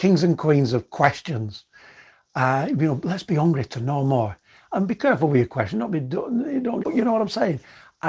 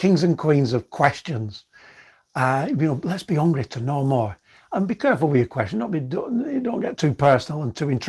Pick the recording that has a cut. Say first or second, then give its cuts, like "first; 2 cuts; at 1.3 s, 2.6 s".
first; 1 cut; at 6.8 s